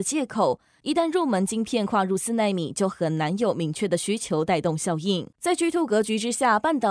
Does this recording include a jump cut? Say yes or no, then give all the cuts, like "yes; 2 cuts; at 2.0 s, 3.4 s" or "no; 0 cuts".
yes; 1 cut; at 5.3 s